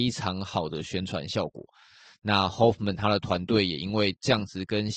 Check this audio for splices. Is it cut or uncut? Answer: uncut